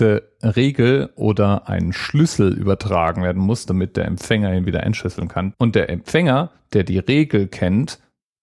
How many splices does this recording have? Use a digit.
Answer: 1